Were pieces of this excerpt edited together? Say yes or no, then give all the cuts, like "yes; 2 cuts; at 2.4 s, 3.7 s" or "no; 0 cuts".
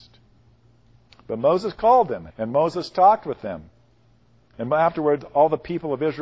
yes; 2 cuts; at 1.1 s, 2.3 s